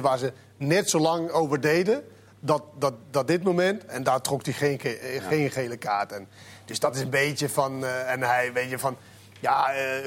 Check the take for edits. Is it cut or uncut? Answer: uncut